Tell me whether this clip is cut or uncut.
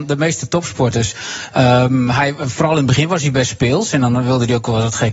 uncut